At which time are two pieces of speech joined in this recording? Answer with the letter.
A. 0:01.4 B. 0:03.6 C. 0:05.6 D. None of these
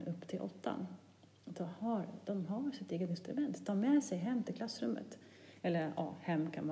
D